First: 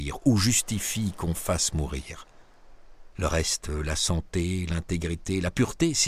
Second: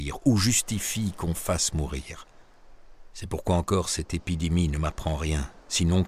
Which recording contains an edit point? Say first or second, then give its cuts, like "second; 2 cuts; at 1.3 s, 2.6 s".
first; 1 cut; at 3.1 s